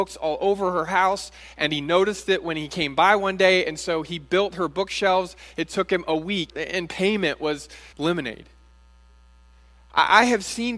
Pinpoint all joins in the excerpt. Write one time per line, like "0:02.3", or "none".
0:06.5
0:07.9